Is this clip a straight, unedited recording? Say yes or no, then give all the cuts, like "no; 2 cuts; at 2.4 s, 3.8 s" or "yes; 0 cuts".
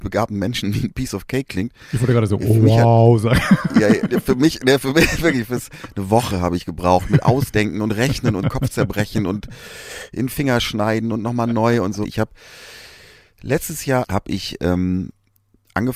no; 2 cuts; at 12.0 s, 14.0 s